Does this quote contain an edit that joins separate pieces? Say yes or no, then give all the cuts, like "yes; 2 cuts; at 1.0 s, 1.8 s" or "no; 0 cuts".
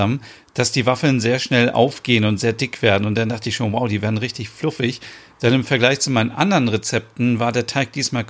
no; 0 cuts